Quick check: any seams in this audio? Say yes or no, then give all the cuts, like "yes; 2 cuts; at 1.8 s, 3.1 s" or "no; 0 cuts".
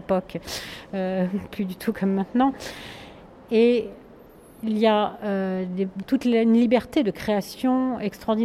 no; 0 cuts